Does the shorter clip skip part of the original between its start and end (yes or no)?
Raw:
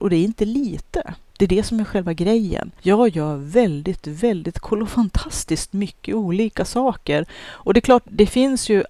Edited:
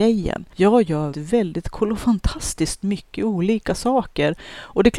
yes